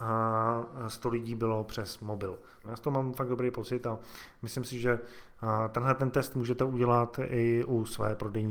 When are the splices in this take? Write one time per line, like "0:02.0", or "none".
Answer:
0:02.6